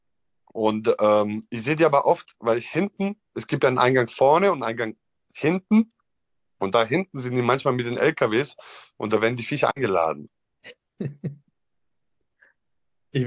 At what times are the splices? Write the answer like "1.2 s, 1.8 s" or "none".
10.3 s